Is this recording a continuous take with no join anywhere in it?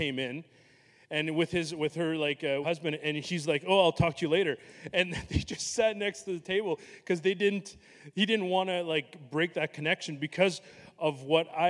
no; 1 cut; at 2.6 s

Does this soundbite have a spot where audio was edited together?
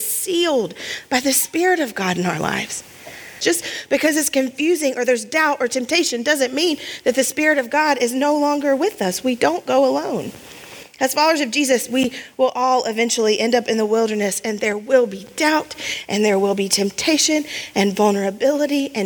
yes; 1 cut; at 3.4 s

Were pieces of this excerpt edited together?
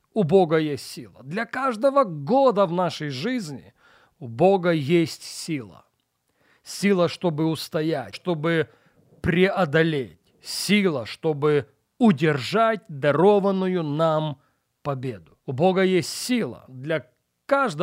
yes; 2 cuts; at 8.1 s, 15.4 s

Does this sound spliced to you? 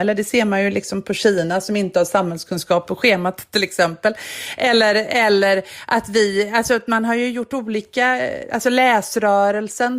no; 0 cuts

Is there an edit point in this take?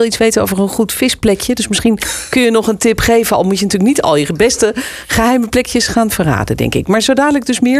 no; 0 cuts

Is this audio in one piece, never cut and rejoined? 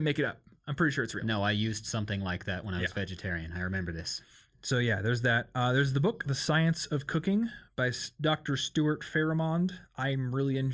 yes; 0 cuts

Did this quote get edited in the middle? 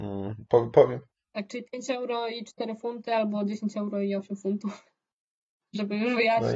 no; 0 cuts

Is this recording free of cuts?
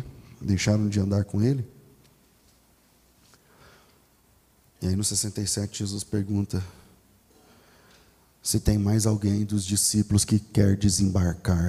yes; 0 cuts

